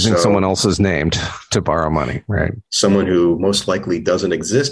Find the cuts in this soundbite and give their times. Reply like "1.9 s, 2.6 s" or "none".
2.6 s